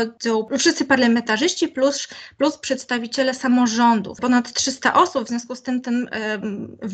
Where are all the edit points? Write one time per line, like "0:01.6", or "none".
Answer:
none